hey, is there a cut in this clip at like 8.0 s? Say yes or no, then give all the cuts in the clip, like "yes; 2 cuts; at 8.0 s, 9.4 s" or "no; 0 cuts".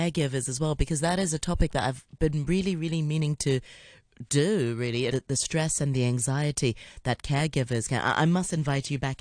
no; 1 cut; at 5.1 s